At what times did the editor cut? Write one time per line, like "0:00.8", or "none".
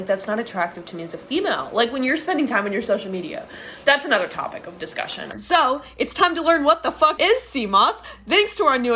0:05.3
0:07.2